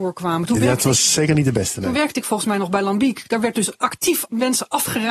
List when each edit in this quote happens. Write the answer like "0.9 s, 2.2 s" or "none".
none